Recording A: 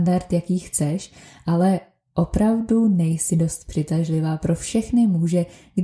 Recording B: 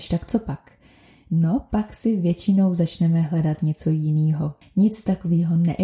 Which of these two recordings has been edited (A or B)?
B